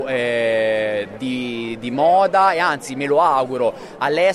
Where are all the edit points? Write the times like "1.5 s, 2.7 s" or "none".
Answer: none

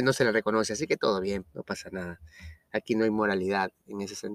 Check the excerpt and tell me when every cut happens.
1.4 s

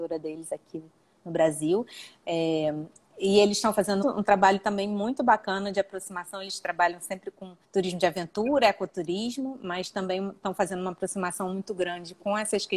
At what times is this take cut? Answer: 4.0 s, 7.6 s

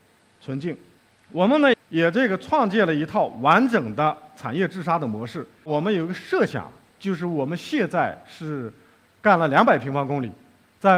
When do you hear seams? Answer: 1.7 s

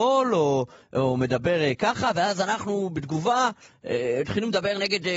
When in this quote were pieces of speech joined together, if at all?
none

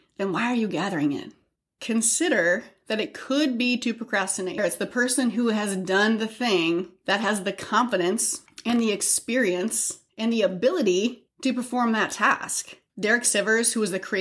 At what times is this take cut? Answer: 4.6 s, 12.9 s

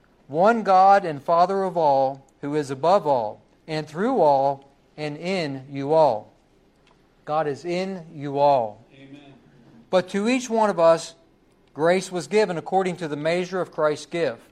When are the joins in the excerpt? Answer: none

